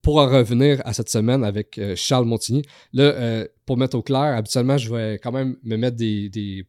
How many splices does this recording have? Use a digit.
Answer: 0